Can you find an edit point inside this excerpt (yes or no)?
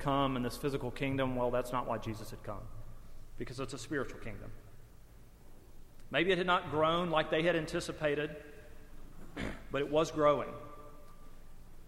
no